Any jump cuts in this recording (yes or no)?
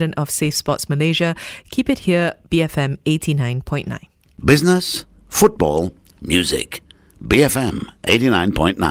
no